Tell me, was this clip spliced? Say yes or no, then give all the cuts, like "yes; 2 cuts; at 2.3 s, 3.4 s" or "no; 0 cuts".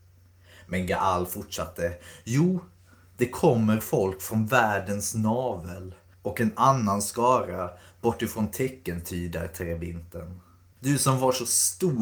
yes; 1 cut; at 10.8 s